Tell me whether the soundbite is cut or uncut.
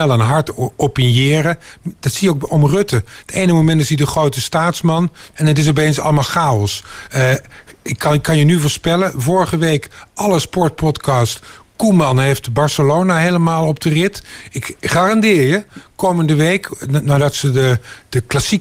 cut